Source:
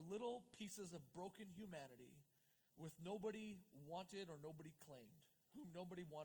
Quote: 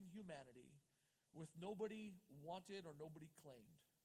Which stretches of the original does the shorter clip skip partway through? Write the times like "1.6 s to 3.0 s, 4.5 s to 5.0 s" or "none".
none